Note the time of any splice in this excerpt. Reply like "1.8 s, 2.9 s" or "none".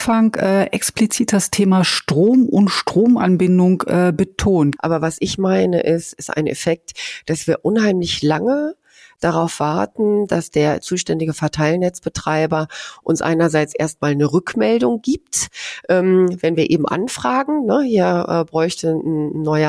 4.8 s